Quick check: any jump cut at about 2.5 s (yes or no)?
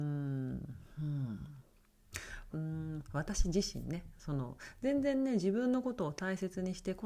yes